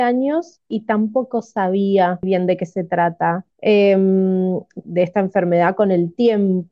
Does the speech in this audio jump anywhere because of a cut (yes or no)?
yes